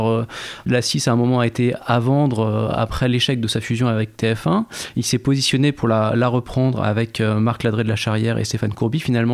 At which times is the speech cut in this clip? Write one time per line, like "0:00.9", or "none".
none